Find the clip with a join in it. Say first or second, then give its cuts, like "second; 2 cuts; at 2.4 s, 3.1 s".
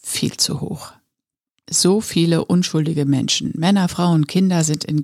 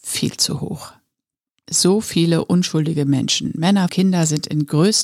second; 1 cut; at 3.9 s